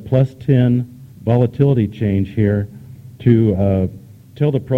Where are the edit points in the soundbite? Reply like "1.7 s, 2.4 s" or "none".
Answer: 1.1 s